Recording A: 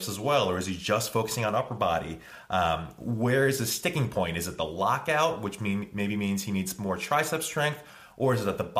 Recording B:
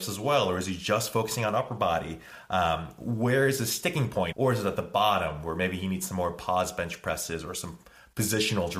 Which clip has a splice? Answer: B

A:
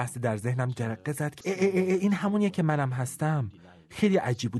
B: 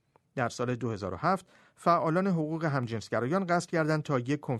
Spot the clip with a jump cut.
A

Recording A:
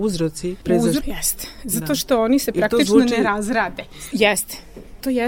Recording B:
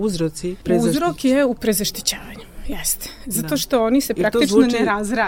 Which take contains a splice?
A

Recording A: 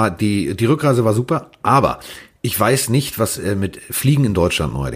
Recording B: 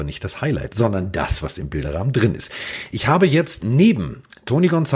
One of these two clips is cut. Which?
B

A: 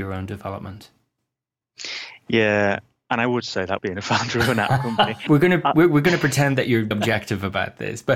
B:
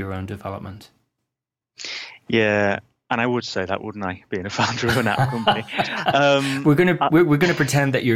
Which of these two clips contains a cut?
A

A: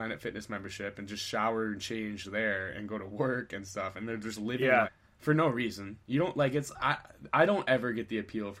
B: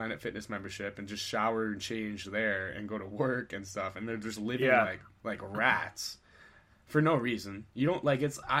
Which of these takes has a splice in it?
A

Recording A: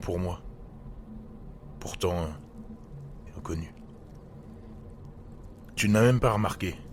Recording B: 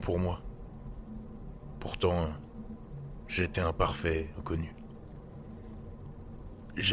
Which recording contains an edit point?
A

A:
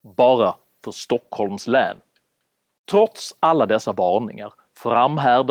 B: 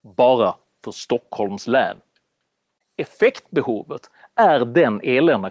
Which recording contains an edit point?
B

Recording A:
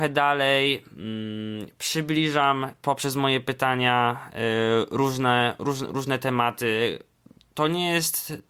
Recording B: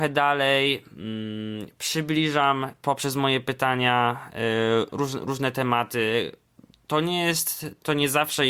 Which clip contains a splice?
B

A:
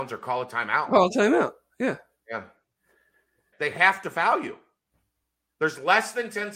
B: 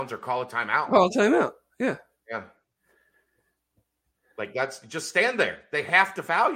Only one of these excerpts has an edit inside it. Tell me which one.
A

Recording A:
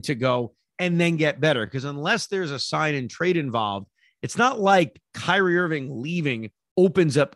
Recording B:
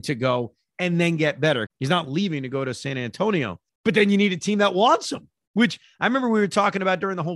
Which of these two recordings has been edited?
B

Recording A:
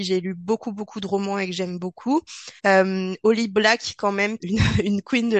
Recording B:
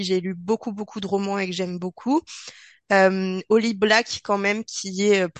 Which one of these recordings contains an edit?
A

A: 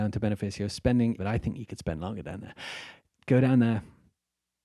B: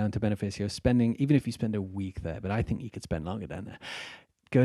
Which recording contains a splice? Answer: A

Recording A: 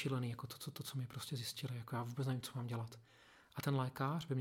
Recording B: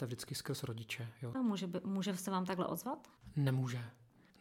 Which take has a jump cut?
B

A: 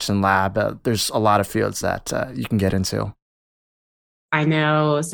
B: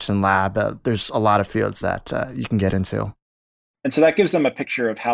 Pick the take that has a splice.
B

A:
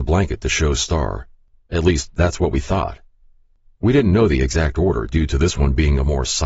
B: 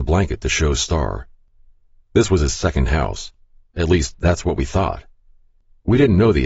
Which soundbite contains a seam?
A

